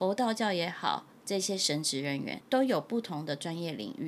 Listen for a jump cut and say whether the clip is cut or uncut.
cut